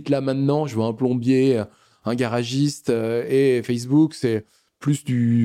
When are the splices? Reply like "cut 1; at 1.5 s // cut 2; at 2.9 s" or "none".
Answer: none